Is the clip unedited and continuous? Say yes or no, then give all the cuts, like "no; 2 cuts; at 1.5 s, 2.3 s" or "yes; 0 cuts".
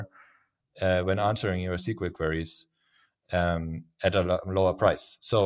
yes; 0 cuts